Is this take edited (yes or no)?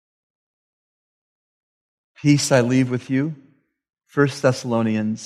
yes